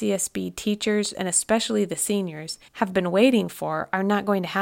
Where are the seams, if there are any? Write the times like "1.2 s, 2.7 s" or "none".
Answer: 1.1 s, 2.7 s